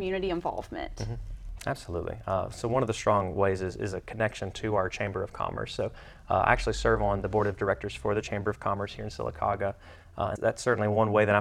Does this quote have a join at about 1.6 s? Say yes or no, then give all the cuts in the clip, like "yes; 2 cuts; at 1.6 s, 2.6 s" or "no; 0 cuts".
yes; 2 cuts; at 1.6 s, 10.4 s